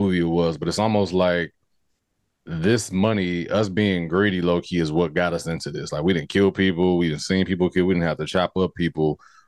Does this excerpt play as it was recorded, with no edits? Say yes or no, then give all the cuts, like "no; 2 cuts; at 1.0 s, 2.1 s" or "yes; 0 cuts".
yes; 0 cuts